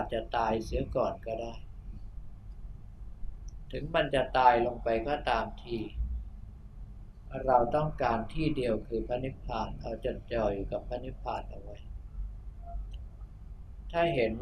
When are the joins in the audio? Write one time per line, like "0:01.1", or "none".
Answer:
0:10.0